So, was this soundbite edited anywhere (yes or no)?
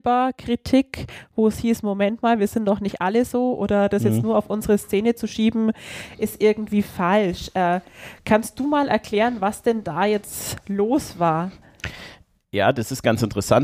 no